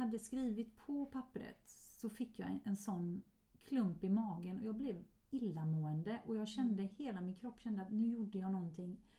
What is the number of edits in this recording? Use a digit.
0